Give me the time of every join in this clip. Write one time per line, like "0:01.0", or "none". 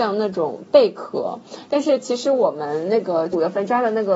none